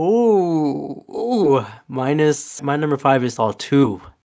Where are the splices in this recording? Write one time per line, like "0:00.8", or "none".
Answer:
0:02.6